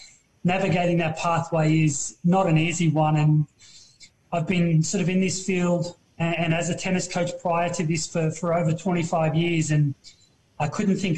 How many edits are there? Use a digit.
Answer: 0